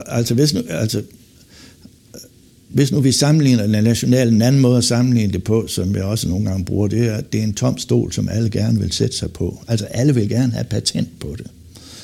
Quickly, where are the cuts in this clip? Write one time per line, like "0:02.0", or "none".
none